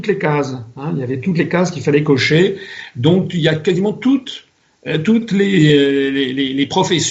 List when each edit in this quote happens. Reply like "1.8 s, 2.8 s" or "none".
none